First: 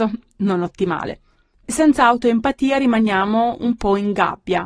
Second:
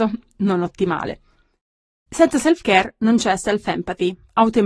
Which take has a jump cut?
first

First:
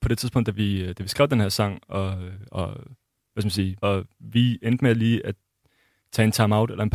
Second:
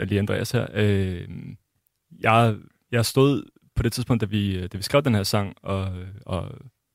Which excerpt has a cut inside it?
first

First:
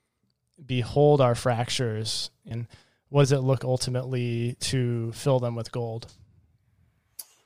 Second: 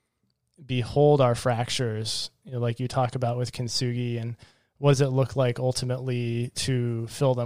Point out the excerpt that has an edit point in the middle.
first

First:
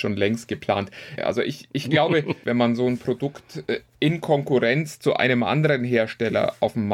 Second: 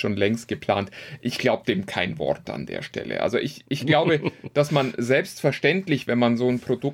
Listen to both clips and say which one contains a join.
first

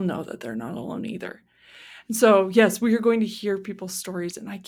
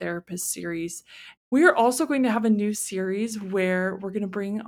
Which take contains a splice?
second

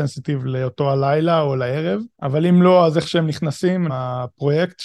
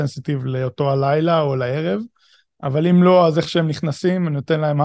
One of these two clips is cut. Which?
first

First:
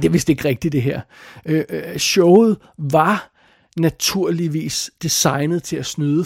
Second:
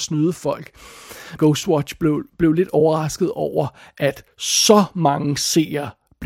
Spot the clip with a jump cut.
second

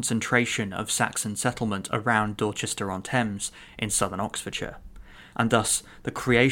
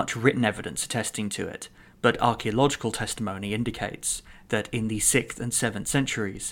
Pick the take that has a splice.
first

